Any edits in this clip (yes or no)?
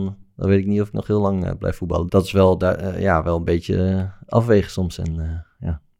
yes